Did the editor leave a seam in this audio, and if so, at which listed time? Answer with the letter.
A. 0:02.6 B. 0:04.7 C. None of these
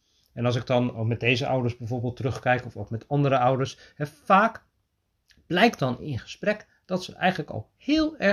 C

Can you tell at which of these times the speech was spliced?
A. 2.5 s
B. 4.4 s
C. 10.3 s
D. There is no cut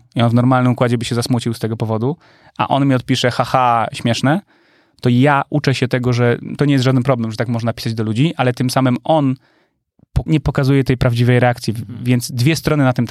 C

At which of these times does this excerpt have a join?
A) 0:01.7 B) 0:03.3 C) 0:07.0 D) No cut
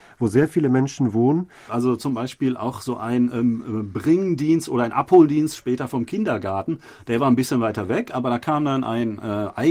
A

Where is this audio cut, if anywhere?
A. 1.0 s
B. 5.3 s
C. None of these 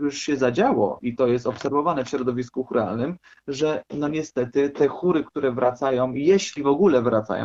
A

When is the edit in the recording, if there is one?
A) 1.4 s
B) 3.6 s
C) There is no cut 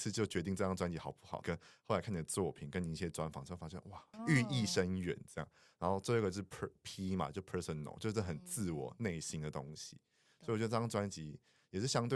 A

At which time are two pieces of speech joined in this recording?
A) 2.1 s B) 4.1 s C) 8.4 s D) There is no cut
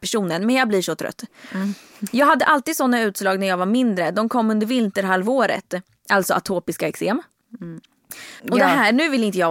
C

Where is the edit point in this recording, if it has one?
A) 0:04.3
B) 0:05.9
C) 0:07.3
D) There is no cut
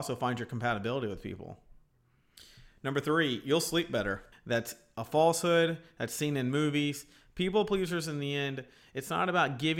A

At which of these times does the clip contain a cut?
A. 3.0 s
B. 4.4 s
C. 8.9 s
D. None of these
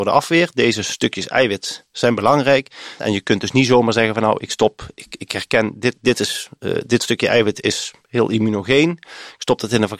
A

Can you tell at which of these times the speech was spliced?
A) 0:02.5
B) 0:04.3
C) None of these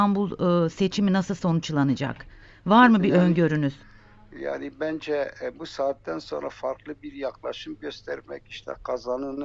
C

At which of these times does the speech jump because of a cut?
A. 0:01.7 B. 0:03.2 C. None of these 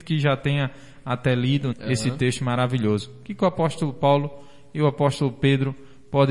A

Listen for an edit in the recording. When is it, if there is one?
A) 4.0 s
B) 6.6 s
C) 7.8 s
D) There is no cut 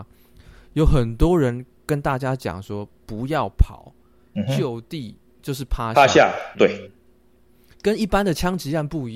B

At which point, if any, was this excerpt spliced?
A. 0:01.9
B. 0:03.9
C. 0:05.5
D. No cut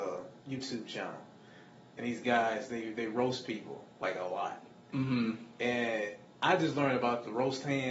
D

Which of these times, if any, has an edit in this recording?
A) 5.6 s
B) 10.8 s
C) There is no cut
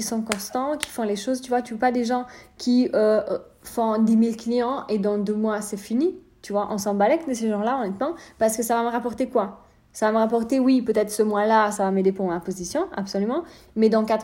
C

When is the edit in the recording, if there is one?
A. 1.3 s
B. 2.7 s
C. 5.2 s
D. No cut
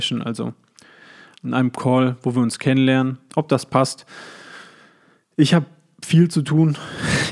A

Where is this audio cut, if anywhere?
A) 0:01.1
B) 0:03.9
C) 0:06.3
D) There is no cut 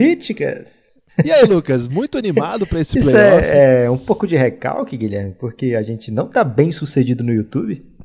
A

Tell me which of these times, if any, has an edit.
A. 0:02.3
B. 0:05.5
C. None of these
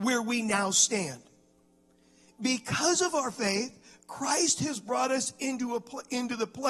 A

